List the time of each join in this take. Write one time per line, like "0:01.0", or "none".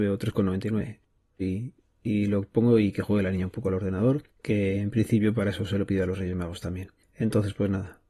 0:01.4